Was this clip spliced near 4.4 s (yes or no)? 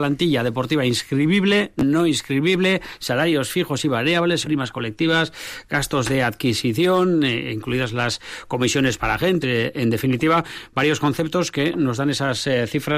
yes